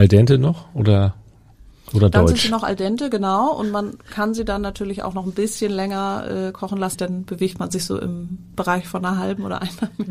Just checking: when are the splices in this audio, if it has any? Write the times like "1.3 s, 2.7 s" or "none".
6.9 s